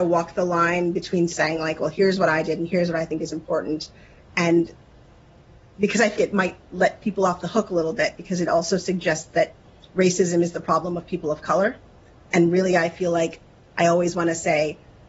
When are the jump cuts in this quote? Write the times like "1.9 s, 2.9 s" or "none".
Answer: 6.2 s

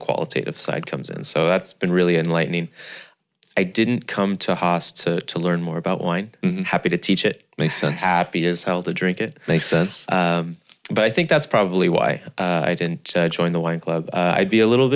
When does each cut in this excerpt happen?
none

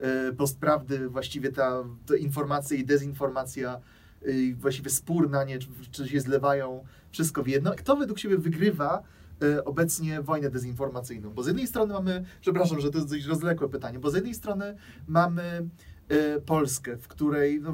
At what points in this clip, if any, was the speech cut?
7.8 s

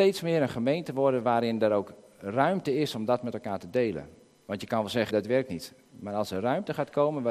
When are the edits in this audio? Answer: 5.1 s

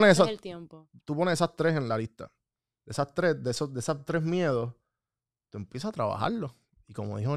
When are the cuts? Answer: none

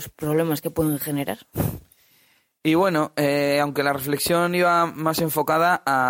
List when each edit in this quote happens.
none

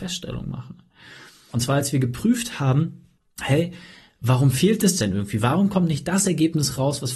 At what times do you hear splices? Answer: none

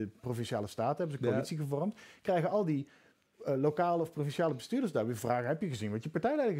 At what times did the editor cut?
none

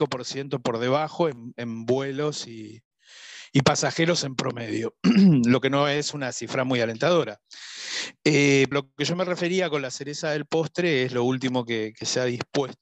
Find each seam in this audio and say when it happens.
8.7 s

